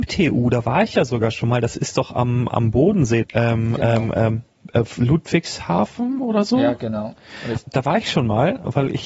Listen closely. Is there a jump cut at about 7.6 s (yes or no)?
yes